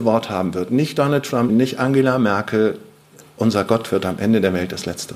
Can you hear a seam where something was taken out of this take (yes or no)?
yes